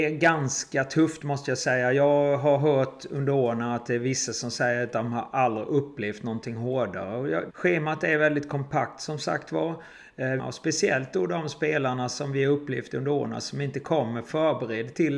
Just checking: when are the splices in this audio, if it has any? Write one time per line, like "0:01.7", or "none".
0:07.5
0:10.4